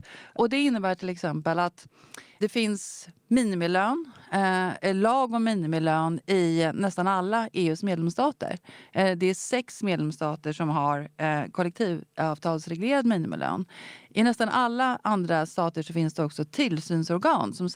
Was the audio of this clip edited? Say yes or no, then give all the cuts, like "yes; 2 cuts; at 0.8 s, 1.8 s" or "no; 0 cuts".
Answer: no; 0 cuts